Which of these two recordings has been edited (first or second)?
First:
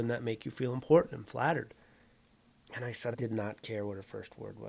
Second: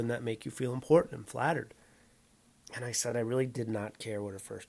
first